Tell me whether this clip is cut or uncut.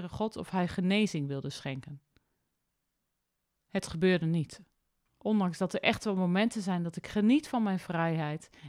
cut